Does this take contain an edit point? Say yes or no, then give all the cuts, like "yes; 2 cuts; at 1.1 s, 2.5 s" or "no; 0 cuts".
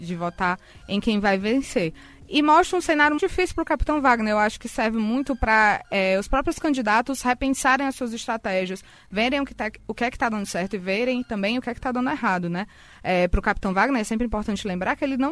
yes; 1 cut; at 3.2 s